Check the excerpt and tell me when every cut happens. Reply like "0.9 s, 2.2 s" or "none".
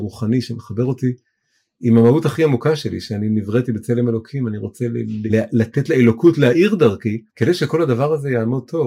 5.3 s, 7.3 s